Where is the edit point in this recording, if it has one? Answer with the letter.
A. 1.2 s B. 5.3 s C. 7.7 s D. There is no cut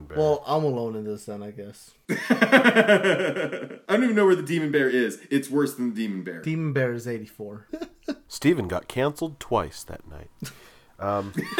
C